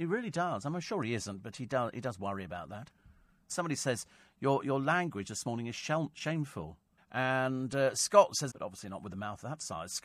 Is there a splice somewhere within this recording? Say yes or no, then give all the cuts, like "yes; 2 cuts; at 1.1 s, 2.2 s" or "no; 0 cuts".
yes; 2 cuts; at 7.0 s, 8.5 s